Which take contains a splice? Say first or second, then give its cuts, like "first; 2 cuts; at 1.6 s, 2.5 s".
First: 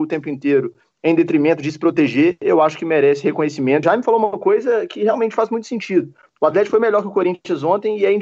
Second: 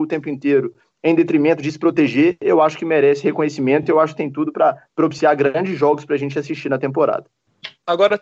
first; 1 cut; at 3.8 s